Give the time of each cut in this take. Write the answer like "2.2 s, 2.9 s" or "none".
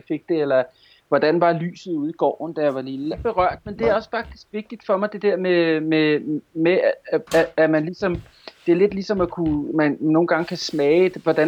3.1 s